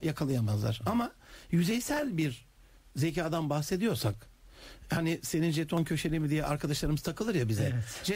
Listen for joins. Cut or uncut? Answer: uncut